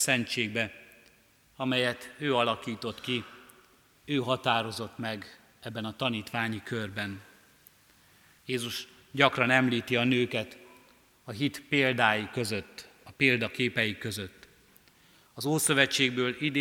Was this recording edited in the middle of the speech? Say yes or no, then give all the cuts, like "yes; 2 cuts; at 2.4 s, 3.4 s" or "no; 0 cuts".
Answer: no; 0 cuts